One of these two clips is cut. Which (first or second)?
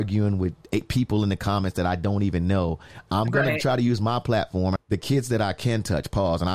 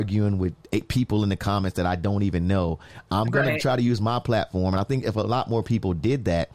first